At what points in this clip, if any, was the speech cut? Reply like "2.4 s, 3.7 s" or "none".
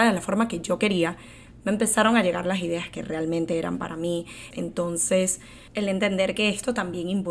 4.5 s

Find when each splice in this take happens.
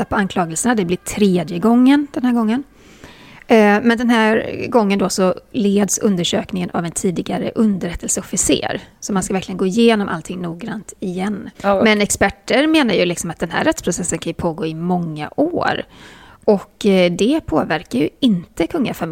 11.5 s

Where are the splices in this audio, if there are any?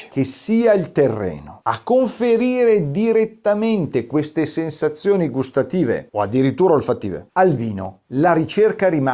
none

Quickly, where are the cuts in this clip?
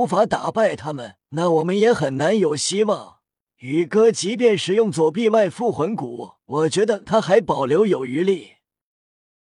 1.2 s, 3.5 s, 6.4 s

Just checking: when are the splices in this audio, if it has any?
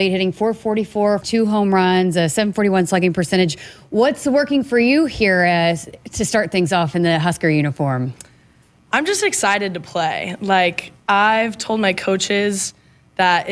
1.2 s

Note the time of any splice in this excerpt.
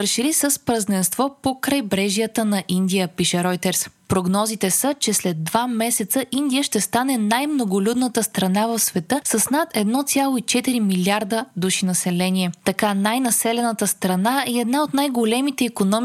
4.0 s, 12.6 s

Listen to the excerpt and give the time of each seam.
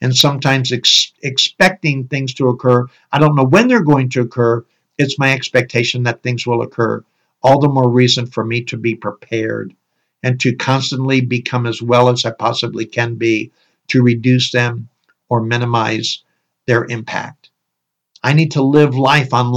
4.8 s, 18.2 s

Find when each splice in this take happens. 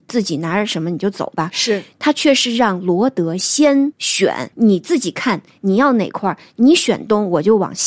4.5 s

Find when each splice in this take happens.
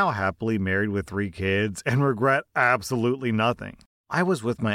none

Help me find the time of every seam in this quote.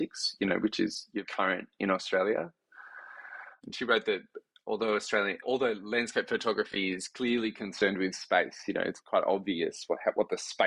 1.2 s, 3.6 s, 5.4 s

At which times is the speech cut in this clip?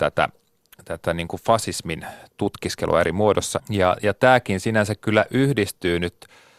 3.6 s

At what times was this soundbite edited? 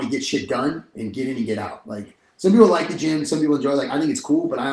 none

